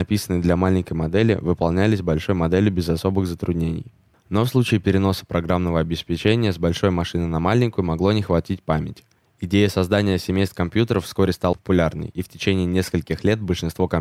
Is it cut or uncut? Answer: cut